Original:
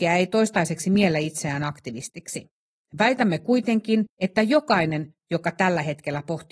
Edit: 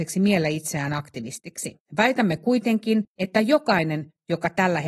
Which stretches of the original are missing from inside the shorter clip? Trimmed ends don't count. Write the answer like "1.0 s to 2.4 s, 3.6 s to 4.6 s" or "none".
2.6 s to 2.9 s